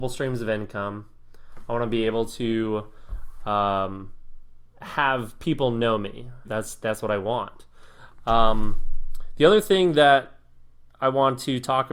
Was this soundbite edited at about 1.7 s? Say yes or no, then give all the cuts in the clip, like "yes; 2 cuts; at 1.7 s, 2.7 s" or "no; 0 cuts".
no; 1 cut; at 6.4 s